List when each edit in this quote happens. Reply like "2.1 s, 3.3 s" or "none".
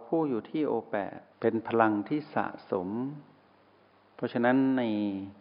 1.3 s